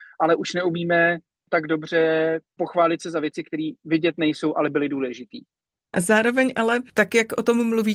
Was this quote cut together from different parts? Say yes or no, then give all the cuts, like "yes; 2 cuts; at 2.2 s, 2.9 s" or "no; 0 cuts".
yes; 1 cut; at 5.9 s